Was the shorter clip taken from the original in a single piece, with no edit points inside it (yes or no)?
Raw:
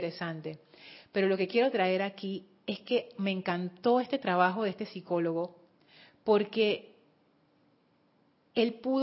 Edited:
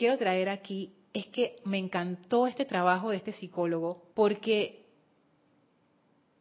no